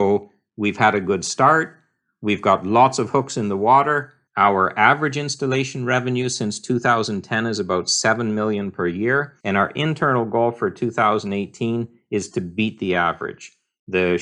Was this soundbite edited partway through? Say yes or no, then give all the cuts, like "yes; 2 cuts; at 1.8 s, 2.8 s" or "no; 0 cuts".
yes; 2 cuts; at 4.3 s, 9.4 s